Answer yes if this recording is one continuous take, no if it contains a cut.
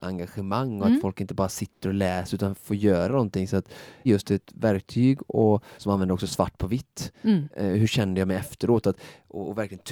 no